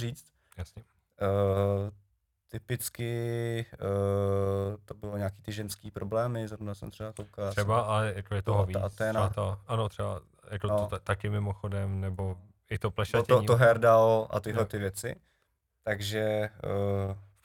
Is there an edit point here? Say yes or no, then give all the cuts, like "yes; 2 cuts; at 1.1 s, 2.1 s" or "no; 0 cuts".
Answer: no; 0 cuts